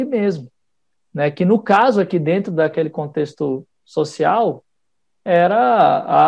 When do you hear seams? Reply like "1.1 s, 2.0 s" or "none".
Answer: none

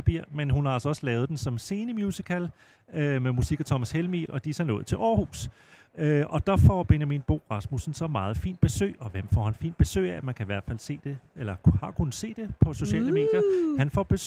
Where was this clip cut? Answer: 4.3 s

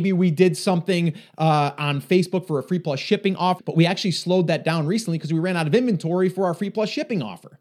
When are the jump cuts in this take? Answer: 3.6 s

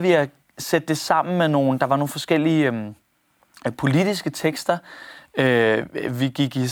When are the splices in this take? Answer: none

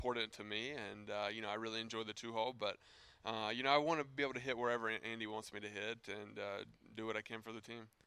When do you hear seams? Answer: none

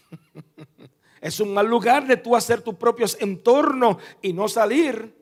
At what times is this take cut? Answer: 1.2 s

